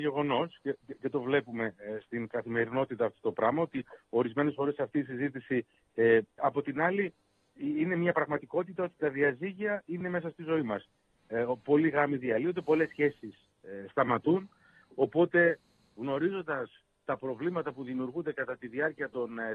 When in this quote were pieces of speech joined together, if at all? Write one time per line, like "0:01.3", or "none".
0:06.4